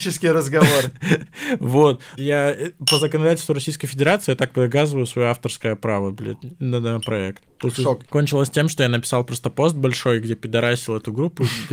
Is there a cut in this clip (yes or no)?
yes